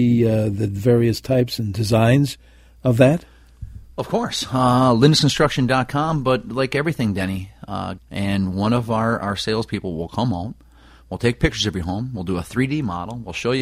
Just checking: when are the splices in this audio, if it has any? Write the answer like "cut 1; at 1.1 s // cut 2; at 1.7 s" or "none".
cut 1; at 8.0 s